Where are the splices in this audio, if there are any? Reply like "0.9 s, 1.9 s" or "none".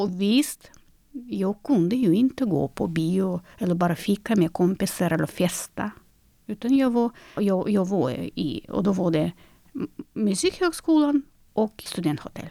7.4 s